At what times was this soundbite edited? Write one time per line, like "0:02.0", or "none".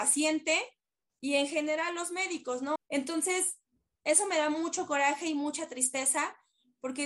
0:02.8